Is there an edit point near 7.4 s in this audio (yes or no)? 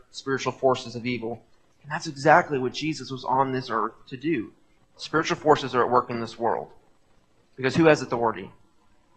yes